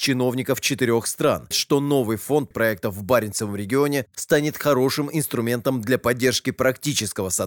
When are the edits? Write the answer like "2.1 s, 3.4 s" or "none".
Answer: 1.5 s, 2.5 s